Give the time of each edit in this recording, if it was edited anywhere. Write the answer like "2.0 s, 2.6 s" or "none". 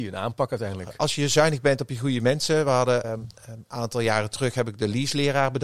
3.0 s